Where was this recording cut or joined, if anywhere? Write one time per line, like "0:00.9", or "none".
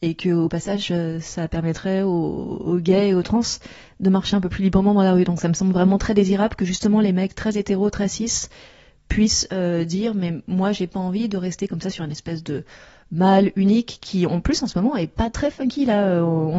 none